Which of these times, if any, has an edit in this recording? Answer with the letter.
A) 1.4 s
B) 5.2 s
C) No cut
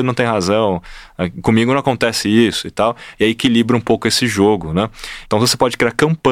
B